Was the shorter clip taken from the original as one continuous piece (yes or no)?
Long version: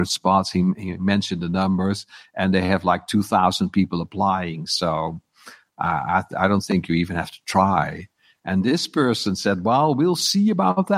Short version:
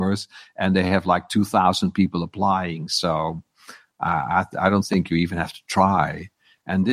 yes